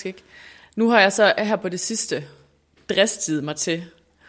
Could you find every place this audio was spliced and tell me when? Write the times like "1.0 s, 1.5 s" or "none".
none